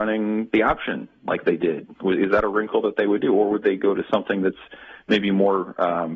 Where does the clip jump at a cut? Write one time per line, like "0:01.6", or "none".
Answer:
none